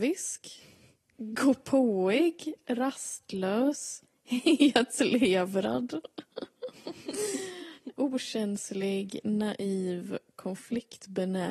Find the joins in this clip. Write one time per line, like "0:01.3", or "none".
0:07.9